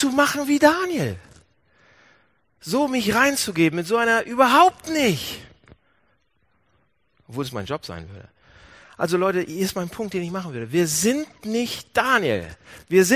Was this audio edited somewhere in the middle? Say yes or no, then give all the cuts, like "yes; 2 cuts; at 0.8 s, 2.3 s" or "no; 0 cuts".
no; 0 cuts